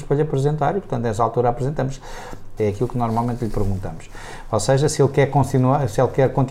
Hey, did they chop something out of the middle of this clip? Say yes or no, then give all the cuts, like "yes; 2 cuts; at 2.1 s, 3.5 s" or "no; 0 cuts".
yes; 1 cut; at 2.6 s